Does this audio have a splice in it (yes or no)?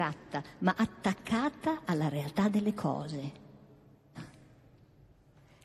yes